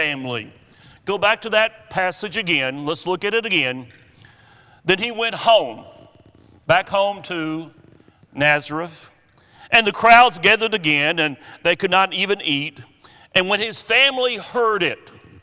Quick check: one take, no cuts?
yes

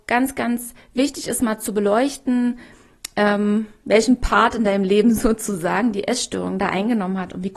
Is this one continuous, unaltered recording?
yes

